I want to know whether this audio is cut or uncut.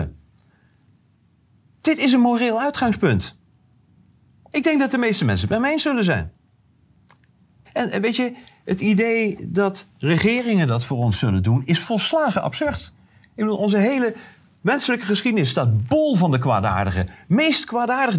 cut